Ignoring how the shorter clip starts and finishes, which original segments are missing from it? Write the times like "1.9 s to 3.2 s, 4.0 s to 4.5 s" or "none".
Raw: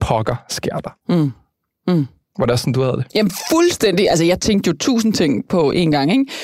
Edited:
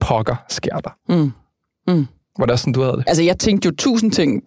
3.1 s to 4.1 s

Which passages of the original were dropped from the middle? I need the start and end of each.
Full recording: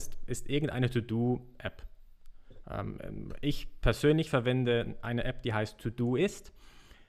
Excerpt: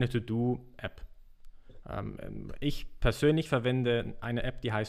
none

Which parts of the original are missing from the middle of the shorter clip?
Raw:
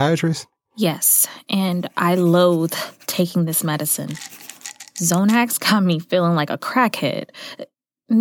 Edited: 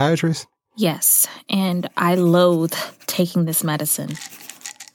none

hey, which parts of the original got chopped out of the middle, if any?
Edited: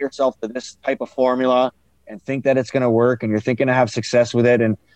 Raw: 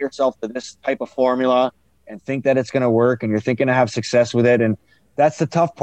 none

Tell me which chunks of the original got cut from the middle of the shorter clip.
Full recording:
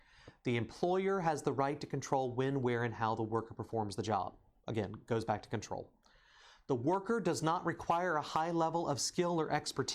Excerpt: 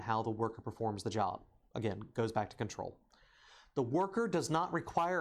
none

